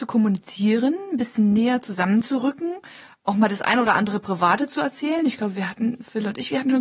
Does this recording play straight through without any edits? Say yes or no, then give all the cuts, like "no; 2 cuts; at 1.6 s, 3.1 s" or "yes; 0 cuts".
yes; 0 cuts